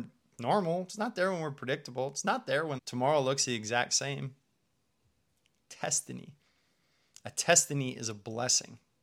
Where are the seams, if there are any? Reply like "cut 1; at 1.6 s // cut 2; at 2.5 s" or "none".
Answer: cut 1; at 2.8 s